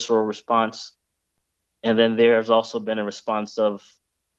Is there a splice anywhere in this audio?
no; 0 cuts

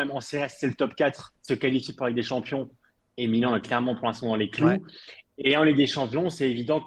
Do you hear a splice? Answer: yes; 1 cut; at 1.4 s

